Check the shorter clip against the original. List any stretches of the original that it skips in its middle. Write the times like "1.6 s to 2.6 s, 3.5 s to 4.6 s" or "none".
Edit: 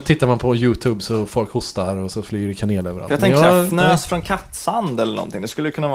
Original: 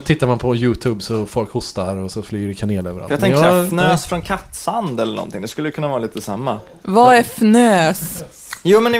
none